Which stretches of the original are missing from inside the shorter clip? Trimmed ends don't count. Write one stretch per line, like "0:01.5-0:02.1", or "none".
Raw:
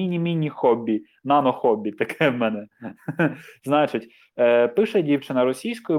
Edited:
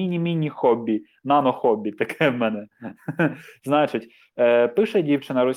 none